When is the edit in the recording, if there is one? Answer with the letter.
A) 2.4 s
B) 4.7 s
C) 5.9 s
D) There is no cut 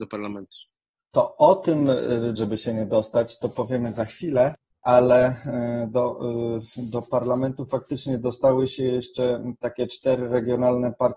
A